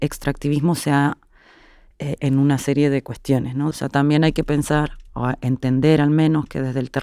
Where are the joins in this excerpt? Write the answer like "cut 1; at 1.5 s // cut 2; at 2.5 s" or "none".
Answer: cut 1; at 2.2 s // cut 2; at 3.7 s